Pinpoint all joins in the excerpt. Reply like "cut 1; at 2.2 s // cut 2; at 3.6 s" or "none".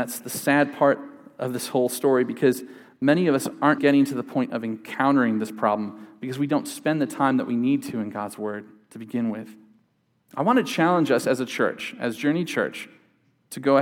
cut 1; at 3.8 s